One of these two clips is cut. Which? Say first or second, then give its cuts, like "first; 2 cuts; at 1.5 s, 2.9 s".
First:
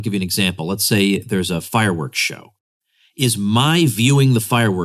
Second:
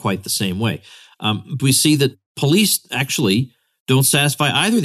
second; 1 cut; at 1.6 s